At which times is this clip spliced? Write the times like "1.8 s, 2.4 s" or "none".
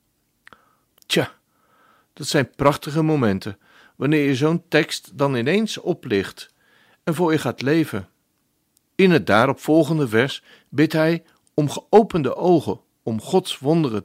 0.9 s, 8.8 s